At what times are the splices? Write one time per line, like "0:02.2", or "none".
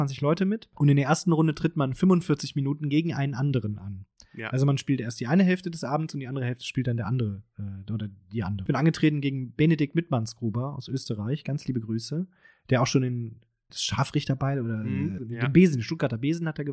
0:13.7
0:15.2